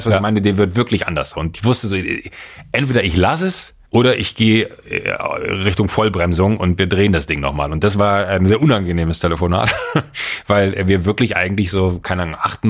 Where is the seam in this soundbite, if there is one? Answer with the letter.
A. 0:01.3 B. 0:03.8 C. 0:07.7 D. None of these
B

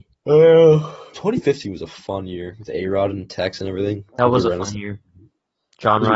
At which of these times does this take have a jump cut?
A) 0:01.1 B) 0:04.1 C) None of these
A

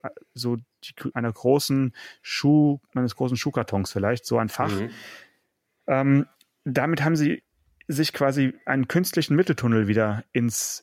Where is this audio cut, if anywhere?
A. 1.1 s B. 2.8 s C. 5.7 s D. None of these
A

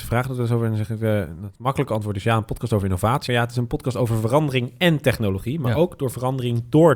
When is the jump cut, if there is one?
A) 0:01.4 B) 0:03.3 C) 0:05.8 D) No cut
B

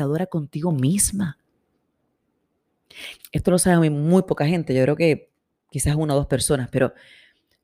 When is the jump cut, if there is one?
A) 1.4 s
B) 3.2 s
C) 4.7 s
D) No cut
B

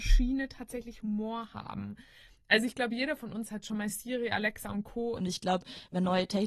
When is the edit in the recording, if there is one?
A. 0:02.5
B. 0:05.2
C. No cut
B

